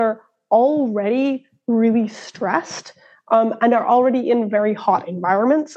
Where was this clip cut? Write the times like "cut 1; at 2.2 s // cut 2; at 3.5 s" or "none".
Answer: none

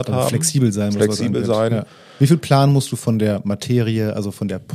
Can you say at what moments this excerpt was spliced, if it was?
none

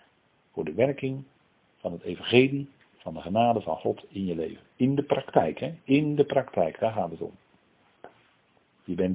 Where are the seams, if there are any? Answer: none

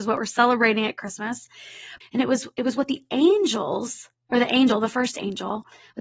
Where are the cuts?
cut 1; at 2.0 s

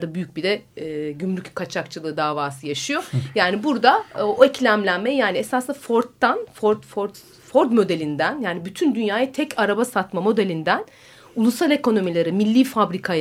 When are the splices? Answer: none

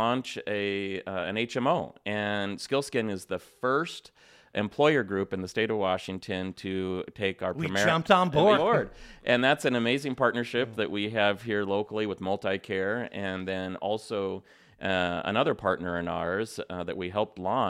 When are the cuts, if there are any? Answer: cut 1; at 8.5 s

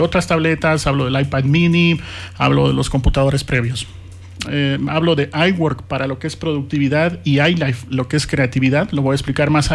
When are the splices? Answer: cut 1; at 4.4 s

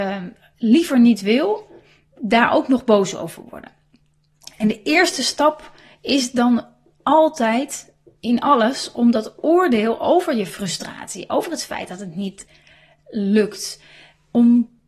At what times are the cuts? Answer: none

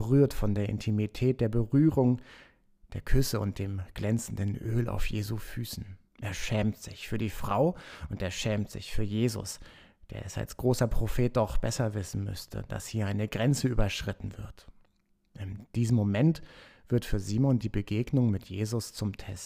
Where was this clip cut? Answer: cut 1; at 6.1 s

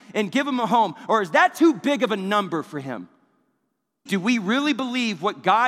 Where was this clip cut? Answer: cut 1; at 4.1 s

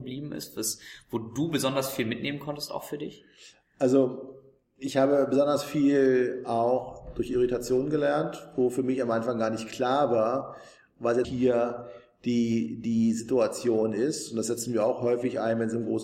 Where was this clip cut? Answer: cut 1; at 11.2 s

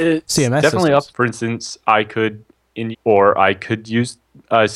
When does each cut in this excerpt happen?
cut 1; at 1.1 s // cut 2; at 2.9 s

